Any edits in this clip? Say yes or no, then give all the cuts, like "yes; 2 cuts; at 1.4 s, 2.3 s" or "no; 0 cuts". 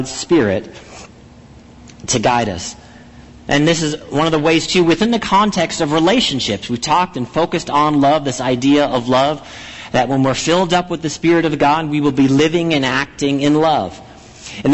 no; 0 cuts